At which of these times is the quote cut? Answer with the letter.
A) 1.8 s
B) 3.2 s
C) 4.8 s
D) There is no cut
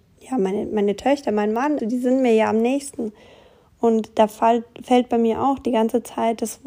A